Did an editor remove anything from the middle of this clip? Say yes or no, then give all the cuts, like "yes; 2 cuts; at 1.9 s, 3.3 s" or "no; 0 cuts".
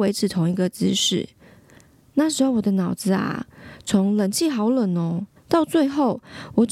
yes; 1 cut; at 5.4 s